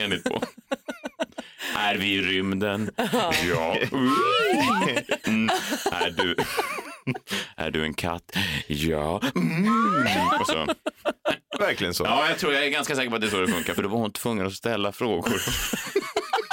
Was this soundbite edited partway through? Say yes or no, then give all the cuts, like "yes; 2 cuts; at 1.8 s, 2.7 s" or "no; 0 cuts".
yes; 3 cuts; at 5.2 s, 11.6 s, 13.8 s